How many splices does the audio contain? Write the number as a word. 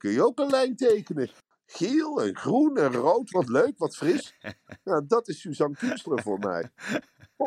one